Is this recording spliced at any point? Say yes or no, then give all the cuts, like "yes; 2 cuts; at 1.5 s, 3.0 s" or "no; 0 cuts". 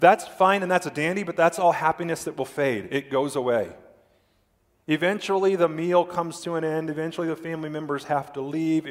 no; 0 cuts